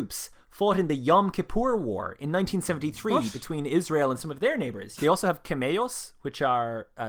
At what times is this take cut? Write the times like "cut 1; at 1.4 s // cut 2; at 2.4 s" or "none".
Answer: cut 1; at 5.0 s